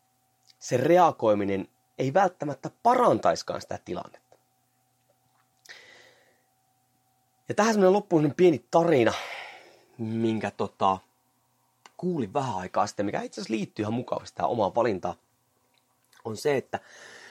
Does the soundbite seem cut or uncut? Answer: uncut